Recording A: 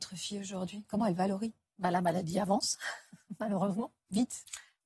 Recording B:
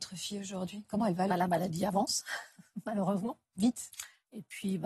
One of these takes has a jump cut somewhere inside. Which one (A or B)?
B